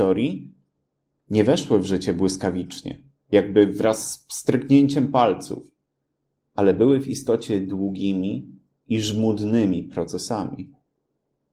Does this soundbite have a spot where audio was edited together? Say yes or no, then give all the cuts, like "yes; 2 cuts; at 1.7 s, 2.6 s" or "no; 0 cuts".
no; 0 cuts